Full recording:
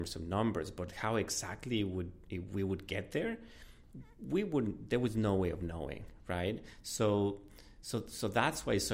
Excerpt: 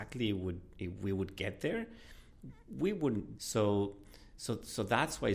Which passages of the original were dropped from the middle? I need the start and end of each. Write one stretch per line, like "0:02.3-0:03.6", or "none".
0:04.9-0:06.8